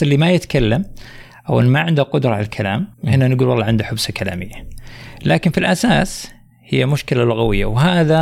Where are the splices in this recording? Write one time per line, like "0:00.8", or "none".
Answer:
0:02.9